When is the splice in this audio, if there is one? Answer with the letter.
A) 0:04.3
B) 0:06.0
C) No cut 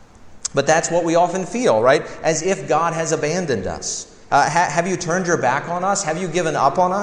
A